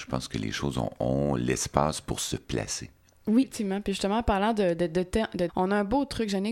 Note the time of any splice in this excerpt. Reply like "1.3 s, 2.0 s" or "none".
5.5 s